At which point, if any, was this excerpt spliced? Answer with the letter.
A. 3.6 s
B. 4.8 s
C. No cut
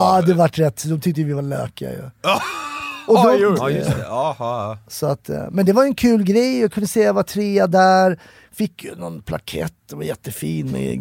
A